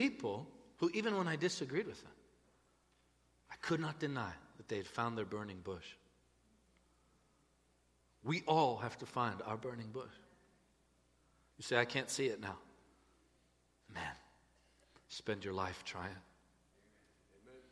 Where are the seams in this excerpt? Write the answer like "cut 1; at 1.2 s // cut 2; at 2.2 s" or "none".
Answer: none